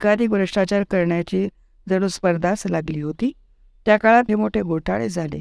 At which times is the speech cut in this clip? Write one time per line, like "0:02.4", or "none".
0:04.3

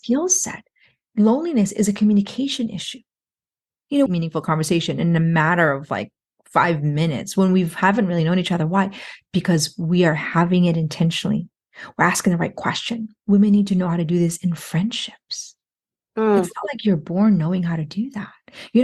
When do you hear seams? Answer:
0:04.1

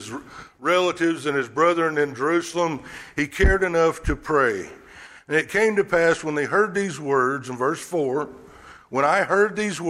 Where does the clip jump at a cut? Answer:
none

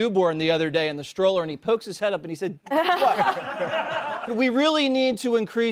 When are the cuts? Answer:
0:02.6
0:04.3

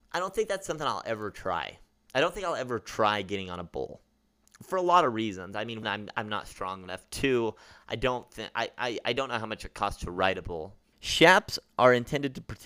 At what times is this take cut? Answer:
0:05.8
0:10.9

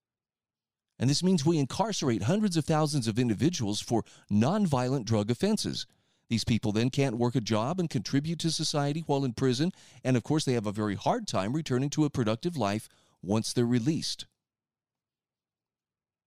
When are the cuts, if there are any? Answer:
none

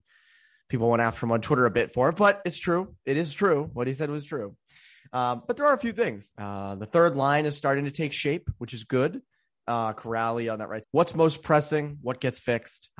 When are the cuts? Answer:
0:06.3
0:10.8

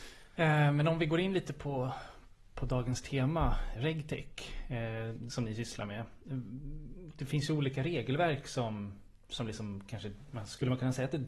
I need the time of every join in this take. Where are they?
0:03.8

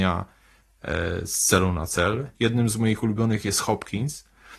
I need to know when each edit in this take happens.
0:02.4

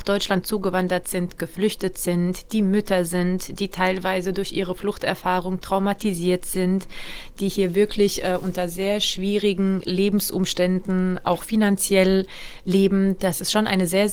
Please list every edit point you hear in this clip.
none

